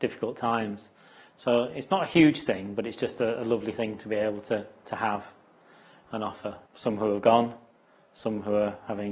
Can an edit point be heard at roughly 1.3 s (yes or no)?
yes